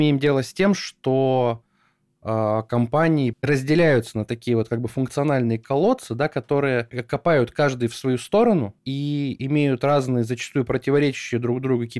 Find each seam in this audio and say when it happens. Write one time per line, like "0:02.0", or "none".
0:03.3
0:08.8

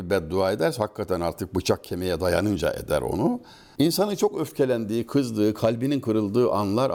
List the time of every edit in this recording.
0:03.8

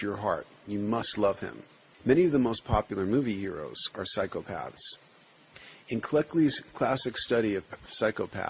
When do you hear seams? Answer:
0:01.9
0:03.9

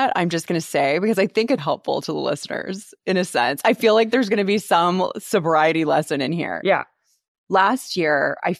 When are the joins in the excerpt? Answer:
0:01.6

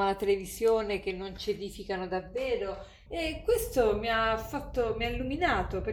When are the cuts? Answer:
0:03.1

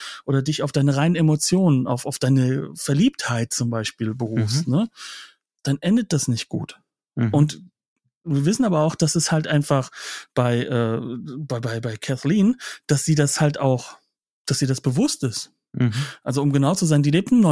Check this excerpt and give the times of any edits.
none

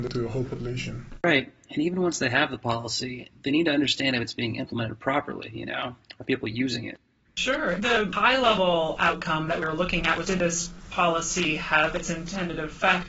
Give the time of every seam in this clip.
0:07.3
0:10.2

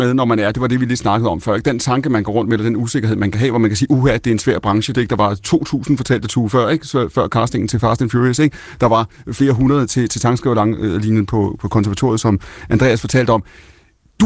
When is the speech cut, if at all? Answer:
0:04.9

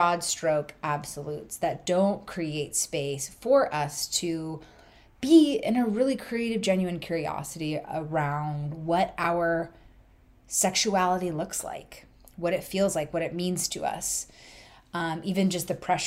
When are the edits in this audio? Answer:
none

